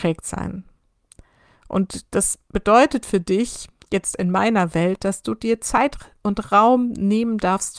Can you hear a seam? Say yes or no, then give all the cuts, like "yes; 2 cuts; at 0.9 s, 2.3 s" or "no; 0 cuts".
no; 0 cuts